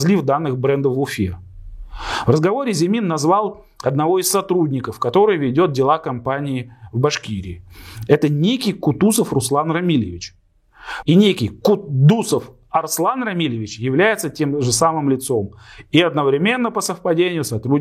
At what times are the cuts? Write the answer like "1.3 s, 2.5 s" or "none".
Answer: 11.0 s